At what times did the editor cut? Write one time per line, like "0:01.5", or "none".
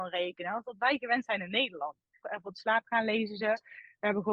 0:02.2